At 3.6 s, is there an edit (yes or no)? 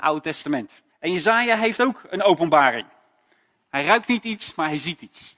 no